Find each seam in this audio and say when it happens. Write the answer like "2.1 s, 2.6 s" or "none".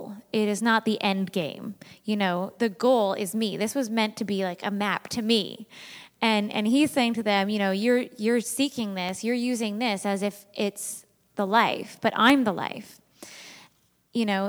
none